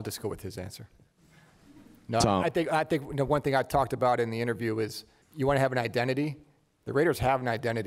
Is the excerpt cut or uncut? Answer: cut